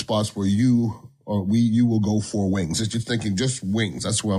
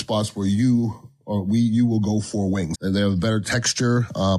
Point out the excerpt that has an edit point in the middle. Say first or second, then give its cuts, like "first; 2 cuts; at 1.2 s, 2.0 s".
second; 1 cut; at 2.7 s